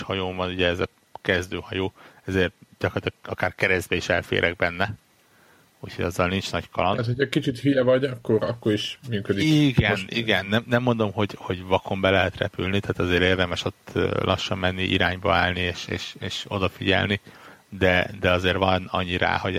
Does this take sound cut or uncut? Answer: uncut